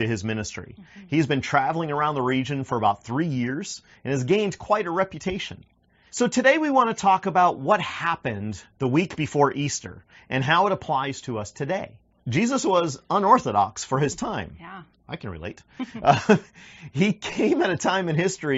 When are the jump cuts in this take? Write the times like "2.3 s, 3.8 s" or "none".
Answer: 6.1 s, 12.1 s

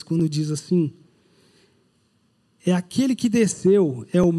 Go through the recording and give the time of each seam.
none

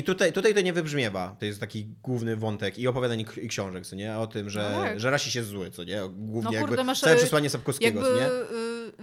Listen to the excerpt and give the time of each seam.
1.4 s

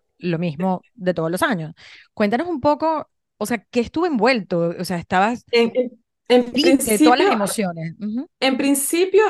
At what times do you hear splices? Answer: 8.3 s

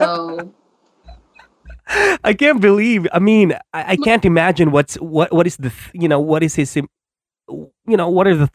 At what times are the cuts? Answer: none

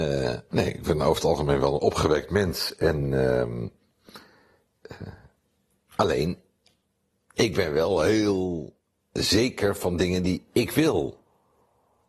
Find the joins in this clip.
none

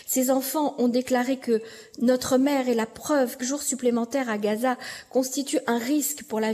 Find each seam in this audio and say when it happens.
3.4 s

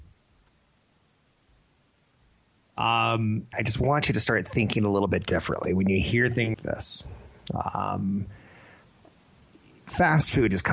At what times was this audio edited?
3.5 s, 6.5 s

